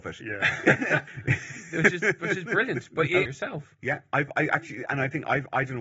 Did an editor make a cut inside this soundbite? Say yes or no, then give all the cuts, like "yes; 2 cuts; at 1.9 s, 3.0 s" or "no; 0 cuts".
yes; 2 cuts; at 1.1 s, 3.3 s